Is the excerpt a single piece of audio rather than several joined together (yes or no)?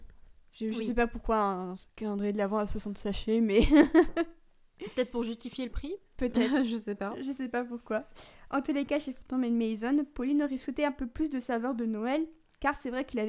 yes